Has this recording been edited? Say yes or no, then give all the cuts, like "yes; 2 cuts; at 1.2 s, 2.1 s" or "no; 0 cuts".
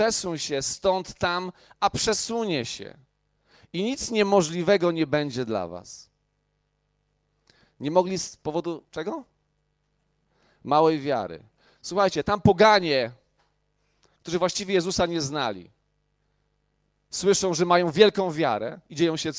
no; 0 cuts